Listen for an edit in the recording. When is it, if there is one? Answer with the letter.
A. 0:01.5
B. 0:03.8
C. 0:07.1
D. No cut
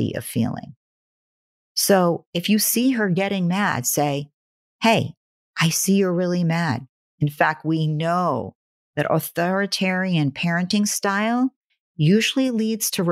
C